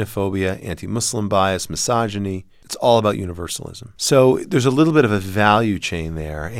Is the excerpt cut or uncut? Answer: cut